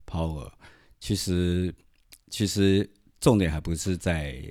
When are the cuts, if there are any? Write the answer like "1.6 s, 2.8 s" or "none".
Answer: none